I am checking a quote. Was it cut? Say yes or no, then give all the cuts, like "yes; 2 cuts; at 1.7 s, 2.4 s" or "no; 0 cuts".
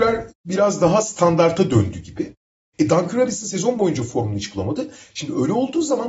no; 0 cuts